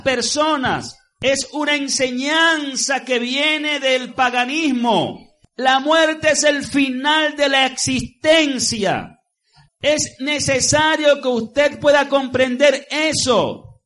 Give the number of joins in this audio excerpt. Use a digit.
2